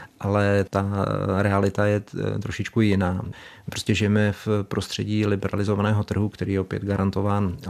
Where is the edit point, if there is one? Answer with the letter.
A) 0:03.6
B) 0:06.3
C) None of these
C